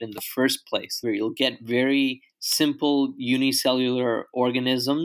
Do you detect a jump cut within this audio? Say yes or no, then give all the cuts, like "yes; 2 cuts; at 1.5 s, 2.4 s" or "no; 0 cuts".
yes; 1 cut; at 1.0 s